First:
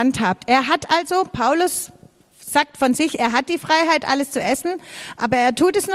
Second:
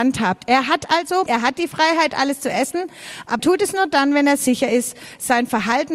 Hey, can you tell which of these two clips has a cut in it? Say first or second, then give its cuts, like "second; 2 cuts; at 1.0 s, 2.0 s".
second; 2 cuts; at 1.3 s, 3.4 s